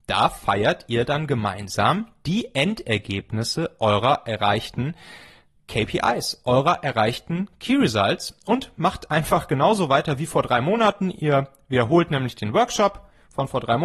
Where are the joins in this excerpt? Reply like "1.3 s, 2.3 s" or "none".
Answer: none

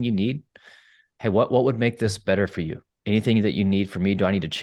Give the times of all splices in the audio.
none

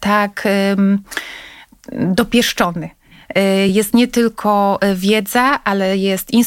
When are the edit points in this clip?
none

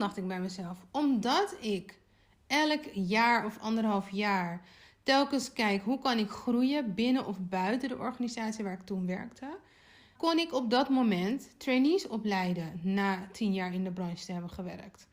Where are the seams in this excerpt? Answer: 10.2 s

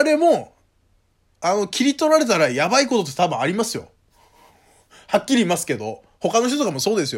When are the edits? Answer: none

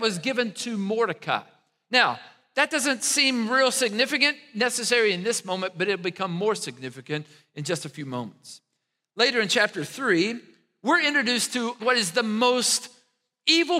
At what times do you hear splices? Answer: 11.8 s

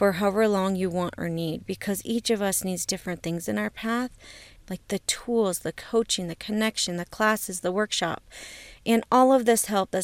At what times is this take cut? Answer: 4.6 s

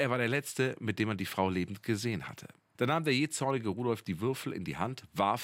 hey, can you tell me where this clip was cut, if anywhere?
2.7 s

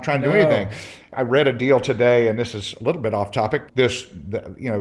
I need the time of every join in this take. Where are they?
1.1 s, 3.7 s

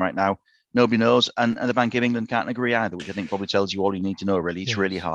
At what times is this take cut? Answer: none

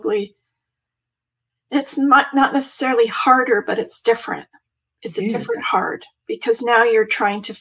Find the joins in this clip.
none

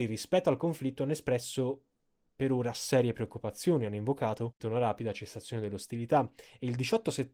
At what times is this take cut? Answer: 4.6 s

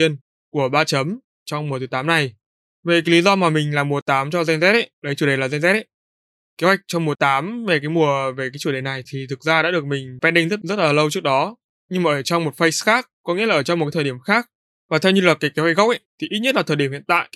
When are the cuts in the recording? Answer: none

